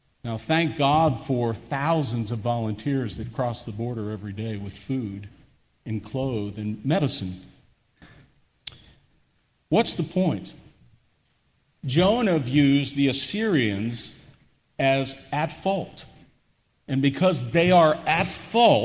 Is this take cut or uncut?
uncut